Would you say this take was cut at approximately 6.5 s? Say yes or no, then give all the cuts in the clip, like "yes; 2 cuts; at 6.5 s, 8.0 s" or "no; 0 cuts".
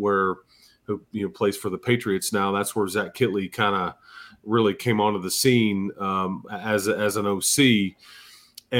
no; 0 cuts